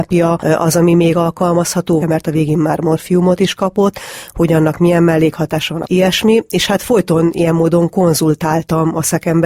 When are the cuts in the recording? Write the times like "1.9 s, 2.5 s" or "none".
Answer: 2.0 s, 5.8 s